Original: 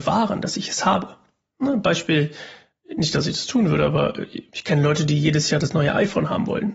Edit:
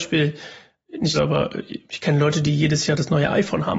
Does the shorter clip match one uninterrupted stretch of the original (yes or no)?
no